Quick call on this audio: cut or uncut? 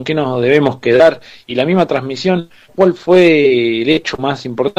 cut